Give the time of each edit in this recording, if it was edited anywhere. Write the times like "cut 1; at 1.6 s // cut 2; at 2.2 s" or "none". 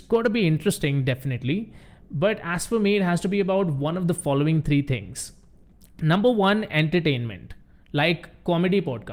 none